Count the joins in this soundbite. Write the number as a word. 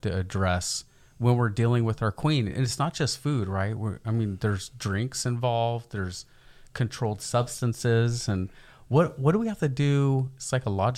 zero